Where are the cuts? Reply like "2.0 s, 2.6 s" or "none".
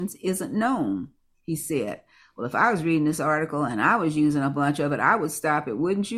none